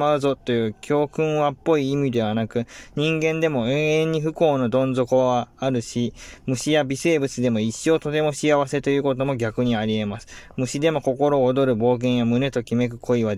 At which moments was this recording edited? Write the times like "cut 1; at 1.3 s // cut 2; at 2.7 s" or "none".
none